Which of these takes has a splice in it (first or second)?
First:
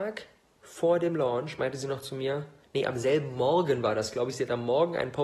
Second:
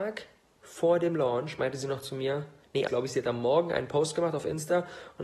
second